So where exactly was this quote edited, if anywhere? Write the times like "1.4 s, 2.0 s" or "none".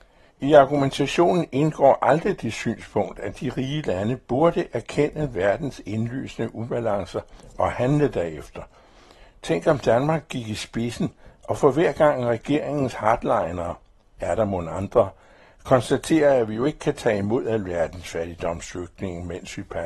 none